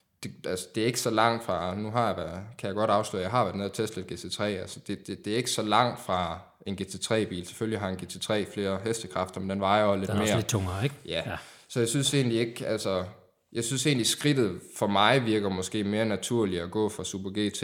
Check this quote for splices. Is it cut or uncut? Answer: uncut